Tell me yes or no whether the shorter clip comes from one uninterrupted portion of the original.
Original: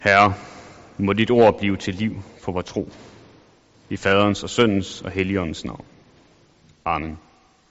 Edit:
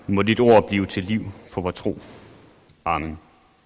no